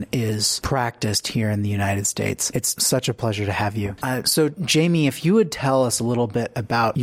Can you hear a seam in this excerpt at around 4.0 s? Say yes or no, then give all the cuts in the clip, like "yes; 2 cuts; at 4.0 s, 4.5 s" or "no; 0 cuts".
yes; 1 cut; at 4.0 s